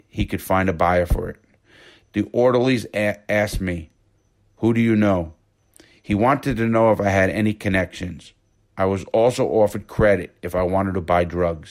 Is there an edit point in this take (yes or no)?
no